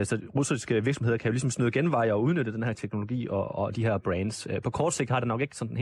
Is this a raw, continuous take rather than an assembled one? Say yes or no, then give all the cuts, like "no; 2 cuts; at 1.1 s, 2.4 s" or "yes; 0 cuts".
no; 1 cut; at 3.5 s